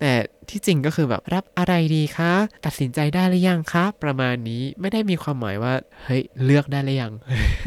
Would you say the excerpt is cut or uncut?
cut